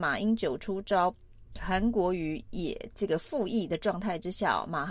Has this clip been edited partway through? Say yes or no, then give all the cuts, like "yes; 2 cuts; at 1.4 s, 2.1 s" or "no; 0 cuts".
no; 0 cuts